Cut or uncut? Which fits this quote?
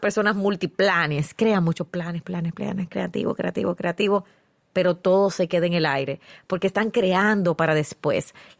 cut